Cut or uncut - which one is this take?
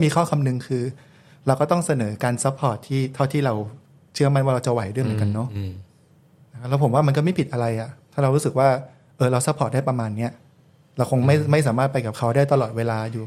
uncut